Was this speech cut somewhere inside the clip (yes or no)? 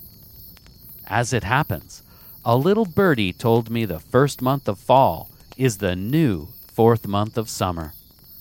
no